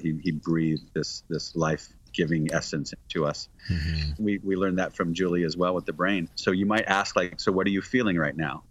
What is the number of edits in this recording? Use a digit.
2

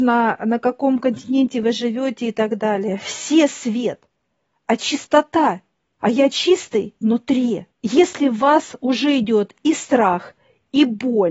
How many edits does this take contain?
2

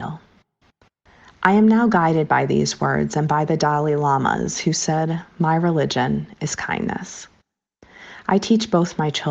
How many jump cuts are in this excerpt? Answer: 0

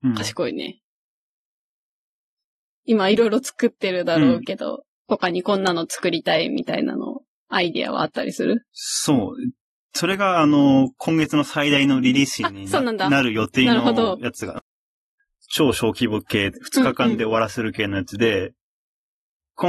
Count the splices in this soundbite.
0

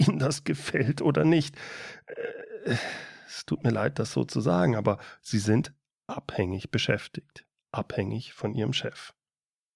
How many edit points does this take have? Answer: 0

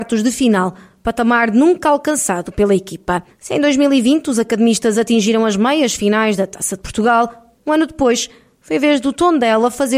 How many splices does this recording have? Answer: 2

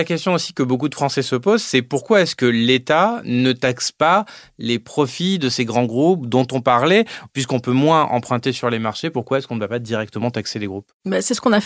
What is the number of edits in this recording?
0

